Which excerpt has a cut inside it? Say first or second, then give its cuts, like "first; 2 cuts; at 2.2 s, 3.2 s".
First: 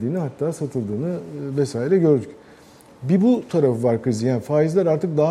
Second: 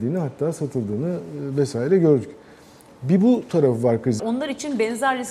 second; 1 cut; at 4.2 s